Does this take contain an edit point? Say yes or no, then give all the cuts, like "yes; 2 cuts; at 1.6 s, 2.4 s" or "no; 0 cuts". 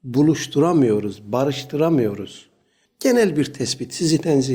yes; 1 cut; at 2.8 s